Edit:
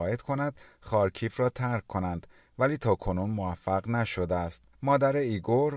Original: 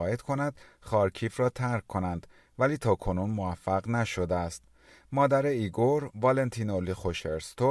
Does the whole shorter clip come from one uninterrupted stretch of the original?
no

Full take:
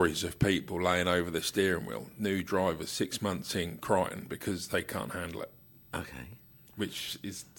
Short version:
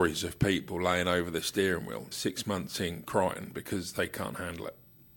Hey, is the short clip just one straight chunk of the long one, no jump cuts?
no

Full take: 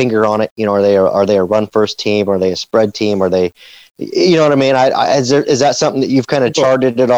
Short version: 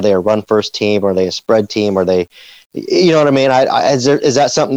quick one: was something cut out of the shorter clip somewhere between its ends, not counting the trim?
no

